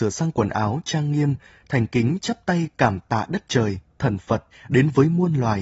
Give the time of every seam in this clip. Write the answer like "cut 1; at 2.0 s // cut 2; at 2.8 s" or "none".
cut 1; at 4.5 s